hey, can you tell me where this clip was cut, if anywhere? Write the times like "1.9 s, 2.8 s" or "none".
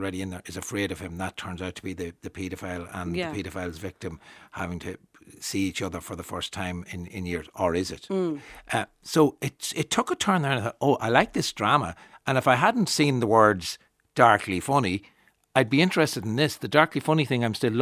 none